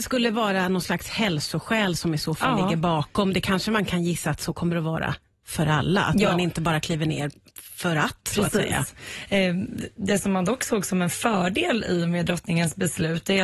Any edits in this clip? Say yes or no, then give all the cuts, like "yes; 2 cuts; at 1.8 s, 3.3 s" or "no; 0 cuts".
no; 0 cuts